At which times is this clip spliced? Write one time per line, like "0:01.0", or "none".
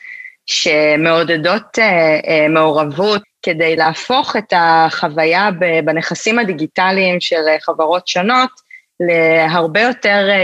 0:03.2